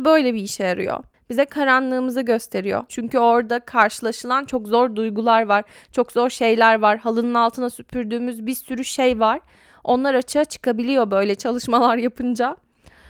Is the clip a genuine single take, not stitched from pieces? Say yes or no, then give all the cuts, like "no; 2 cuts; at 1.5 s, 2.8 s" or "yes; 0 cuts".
no; 1 cut; at 2.9 s